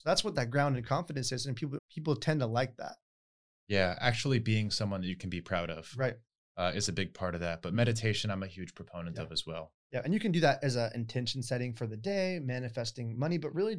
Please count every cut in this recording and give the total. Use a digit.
1